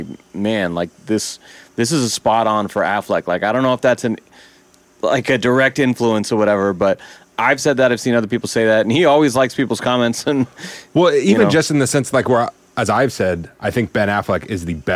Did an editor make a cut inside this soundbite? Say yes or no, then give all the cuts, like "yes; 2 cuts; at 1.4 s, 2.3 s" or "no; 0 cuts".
no; 0 cuts